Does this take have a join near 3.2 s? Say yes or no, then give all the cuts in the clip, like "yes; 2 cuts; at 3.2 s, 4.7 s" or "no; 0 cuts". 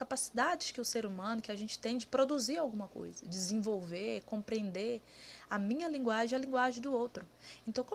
no; 0 cuts